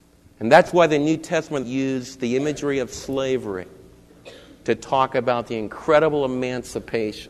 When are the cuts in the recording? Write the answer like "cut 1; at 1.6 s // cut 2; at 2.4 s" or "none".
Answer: cut 1; at 1.6 s